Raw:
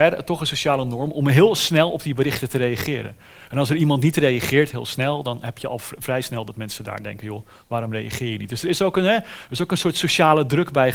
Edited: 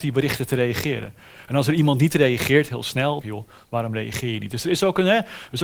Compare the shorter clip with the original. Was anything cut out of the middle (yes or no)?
yes